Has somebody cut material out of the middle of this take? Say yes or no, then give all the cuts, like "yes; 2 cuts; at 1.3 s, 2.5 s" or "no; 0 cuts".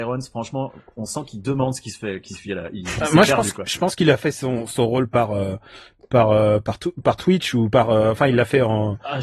no; 0 cuts